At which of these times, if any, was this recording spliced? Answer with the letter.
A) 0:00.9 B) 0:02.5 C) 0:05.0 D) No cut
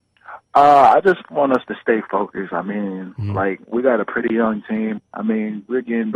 C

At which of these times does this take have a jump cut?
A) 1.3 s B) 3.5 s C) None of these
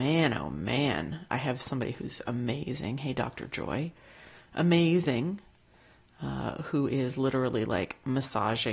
A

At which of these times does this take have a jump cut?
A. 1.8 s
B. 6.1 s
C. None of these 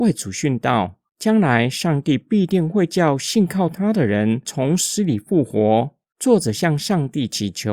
B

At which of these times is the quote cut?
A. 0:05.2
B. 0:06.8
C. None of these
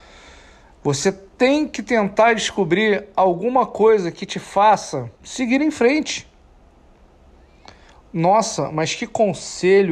A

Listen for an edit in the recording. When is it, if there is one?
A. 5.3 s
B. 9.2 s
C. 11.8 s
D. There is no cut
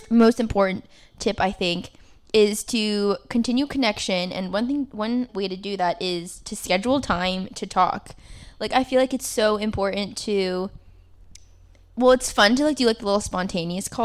A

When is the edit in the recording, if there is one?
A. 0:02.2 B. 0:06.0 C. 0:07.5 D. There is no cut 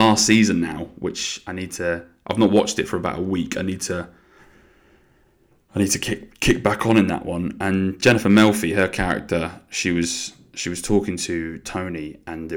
D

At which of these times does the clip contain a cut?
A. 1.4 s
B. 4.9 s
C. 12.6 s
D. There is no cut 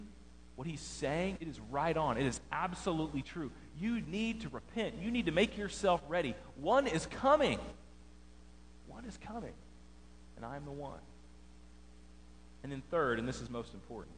A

